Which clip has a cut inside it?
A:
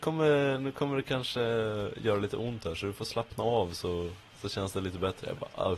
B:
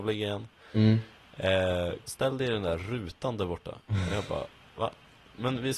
B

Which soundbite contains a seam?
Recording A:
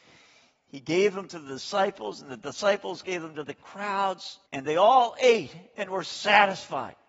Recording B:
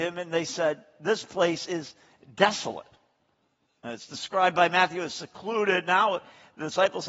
A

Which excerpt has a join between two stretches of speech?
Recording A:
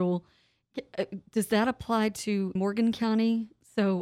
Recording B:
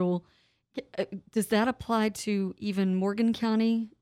A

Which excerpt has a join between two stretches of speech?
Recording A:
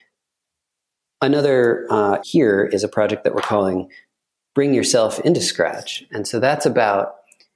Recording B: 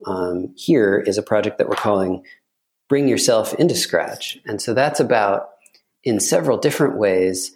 A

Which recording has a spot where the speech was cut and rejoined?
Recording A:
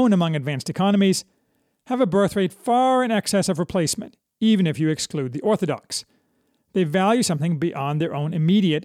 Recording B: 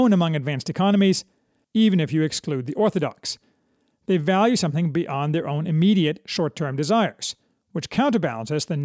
B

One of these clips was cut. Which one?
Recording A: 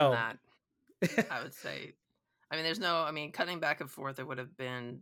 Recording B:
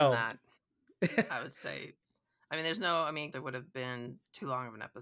B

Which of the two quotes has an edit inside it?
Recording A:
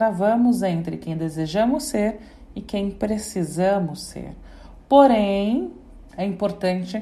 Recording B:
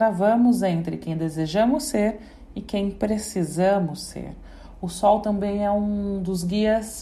A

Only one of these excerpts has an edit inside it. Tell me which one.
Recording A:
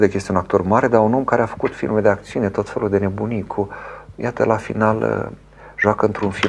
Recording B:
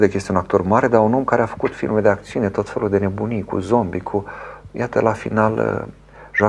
A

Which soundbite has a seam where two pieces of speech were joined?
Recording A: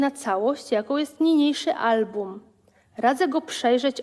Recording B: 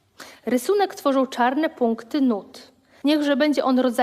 B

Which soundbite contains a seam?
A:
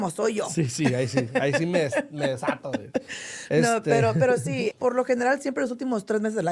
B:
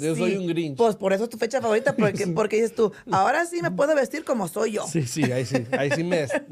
A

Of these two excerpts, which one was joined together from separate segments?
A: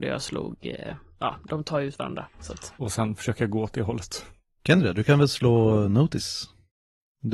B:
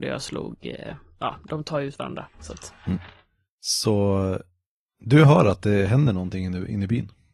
A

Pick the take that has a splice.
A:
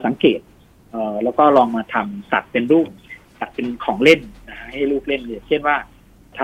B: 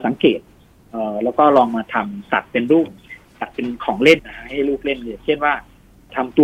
B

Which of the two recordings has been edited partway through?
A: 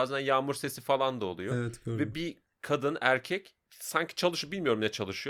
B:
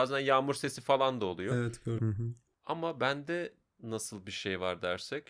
B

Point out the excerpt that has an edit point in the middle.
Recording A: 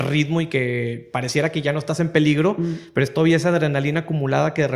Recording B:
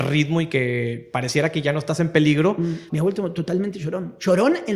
B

